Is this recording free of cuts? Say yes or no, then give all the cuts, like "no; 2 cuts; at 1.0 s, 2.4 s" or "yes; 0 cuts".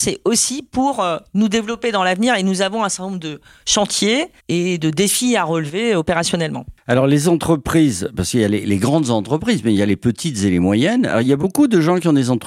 no; 1 cut; at 4.4 s